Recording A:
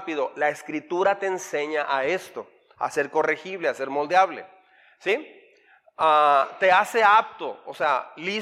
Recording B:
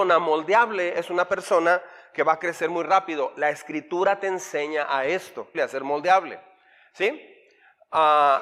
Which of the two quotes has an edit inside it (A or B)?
B